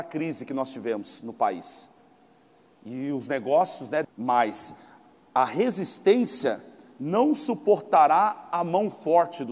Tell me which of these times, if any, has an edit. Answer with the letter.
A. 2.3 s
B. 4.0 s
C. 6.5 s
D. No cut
B